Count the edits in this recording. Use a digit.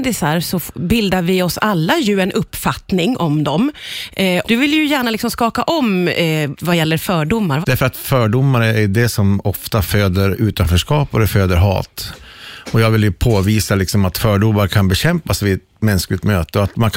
3